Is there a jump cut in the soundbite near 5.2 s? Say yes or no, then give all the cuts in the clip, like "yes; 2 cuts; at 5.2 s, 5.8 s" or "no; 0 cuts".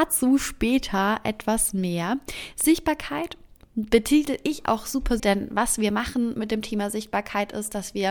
yes; 1 cut; at 5.2 s